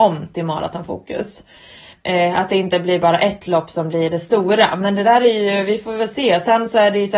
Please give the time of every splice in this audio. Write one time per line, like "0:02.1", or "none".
0:01.9